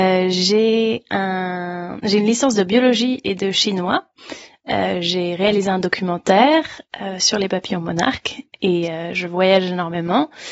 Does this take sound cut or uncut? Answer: uncut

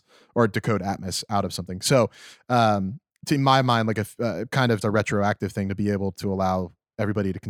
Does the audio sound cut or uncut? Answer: cut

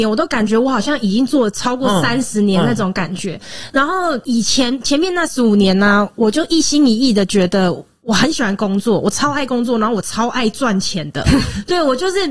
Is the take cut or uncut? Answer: uncut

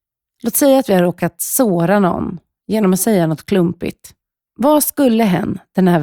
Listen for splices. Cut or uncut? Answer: cut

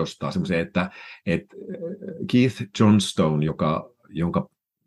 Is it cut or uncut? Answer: uncut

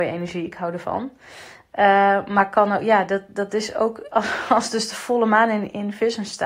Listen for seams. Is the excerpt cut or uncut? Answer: uncut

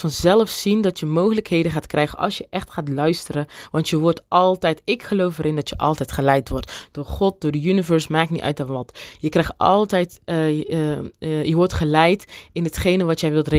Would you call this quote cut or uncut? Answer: uncut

